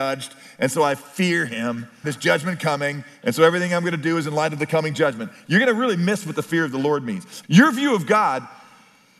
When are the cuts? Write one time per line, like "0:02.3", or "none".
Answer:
0:02.0
0:07.4

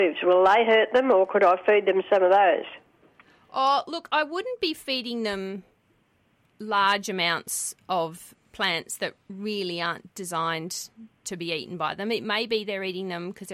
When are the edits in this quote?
none

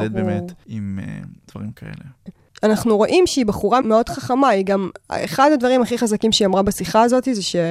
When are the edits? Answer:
0:02.3
0:03.8

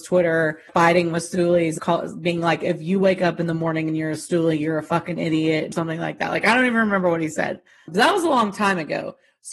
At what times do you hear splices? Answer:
none

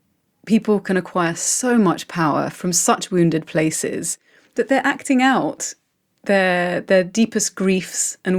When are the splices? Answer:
none

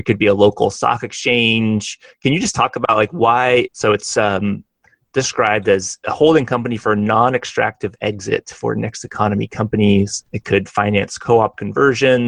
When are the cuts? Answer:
0:03.7
0:10.3

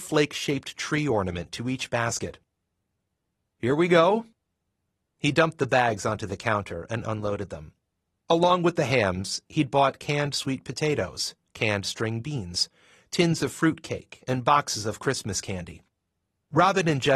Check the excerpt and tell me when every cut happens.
none

